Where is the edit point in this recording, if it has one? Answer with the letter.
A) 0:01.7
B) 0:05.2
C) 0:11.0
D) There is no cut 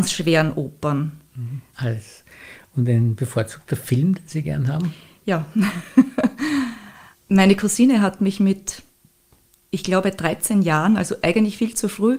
A